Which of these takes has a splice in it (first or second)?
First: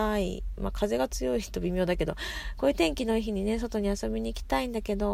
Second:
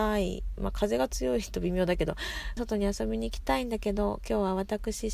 second